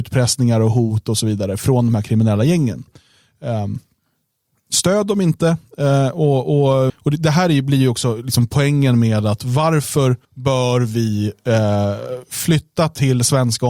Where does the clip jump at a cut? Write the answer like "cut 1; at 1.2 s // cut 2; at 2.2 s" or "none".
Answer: cut 1; at 6.9 s // cut 2; at 10.2 s